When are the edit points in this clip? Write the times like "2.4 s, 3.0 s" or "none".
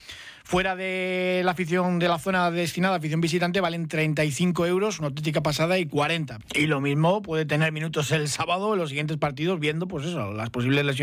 6.4 s